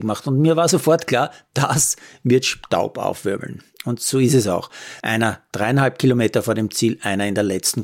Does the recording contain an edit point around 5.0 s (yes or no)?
yes